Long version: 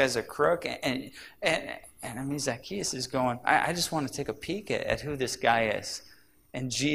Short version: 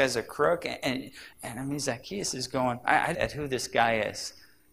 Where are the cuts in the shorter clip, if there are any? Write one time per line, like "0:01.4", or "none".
0:01.3
0:03.1